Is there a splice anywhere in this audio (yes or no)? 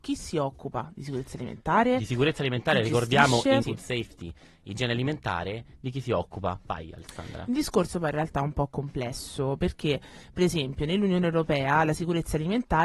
yes